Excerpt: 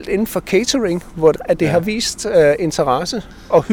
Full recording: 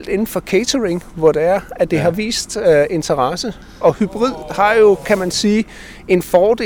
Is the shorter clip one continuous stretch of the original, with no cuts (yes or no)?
no